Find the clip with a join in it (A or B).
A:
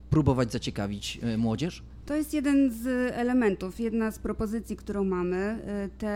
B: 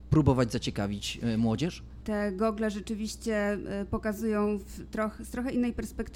B